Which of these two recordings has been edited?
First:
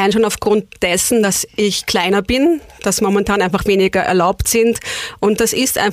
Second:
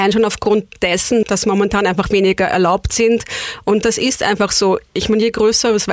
second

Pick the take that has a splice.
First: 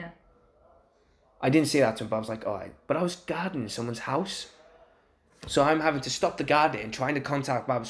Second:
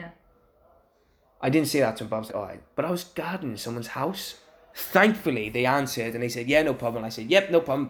second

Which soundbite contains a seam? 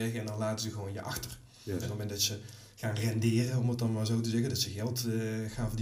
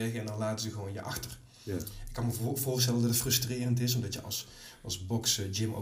first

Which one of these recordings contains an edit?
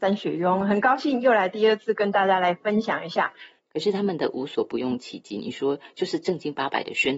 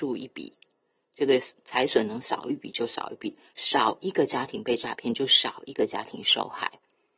first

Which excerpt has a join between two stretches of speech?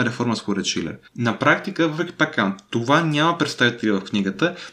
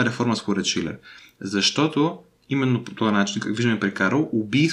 first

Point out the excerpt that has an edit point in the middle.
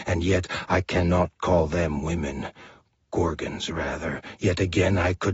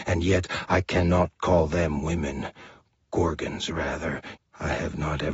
second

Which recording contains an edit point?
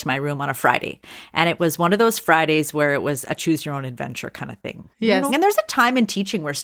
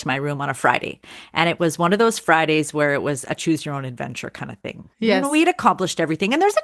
first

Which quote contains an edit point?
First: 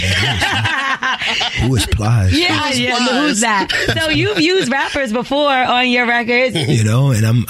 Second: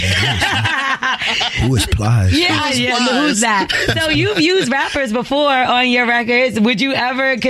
first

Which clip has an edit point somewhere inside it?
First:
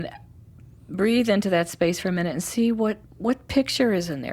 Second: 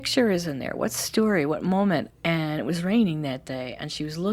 second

